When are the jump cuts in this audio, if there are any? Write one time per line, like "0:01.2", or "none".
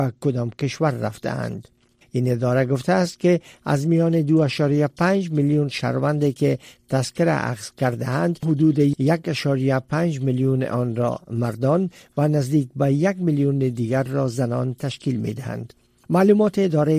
0:02.0